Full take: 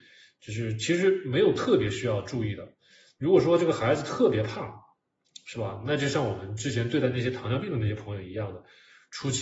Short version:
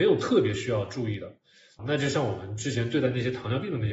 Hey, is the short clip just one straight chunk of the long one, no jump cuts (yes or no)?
no